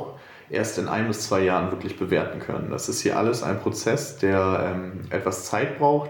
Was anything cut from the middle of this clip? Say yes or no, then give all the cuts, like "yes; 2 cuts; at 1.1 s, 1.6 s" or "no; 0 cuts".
no; 0 cuts